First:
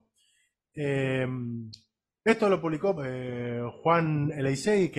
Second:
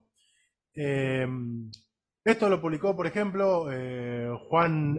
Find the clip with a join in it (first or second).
first